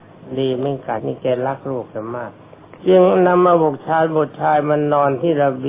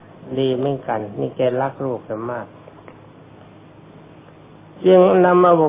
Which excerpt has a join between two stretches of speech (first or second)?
first